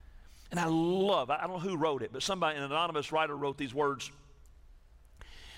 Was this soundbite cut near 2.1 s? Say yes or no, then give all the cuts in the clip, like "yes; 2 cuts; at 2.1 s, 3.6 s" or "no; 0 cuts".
no; 0 cuts